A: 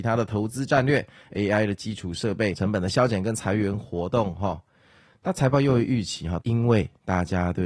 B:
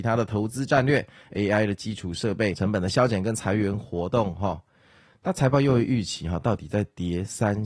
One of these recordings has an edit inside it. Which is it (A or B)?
A